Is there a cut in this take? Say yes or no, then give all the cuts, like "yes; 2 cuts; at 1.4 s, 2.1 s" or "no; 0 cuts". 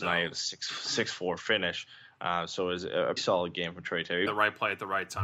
yes; 2 cuts; at 3.2 s, 4.3 s